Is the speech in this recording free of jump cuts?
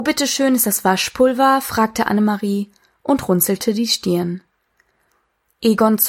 yes; 0 cuts

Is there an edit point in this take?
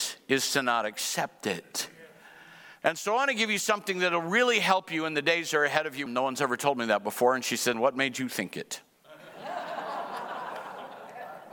yes; 3 cuts; at 2.8 s, 6.1 s, 7.7 s

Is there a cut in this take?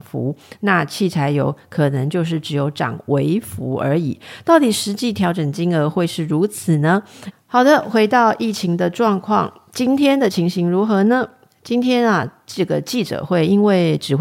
yes; 1 cut; at 7.3 s

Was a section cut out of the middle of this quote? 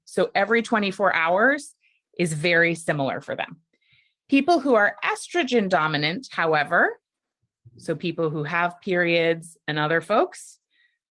no; 0 cuts

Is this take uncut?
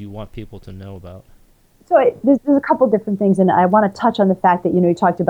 yes; 0 cuts

